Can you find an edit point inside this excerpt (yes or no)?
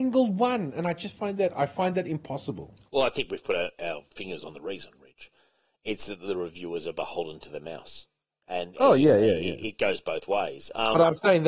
no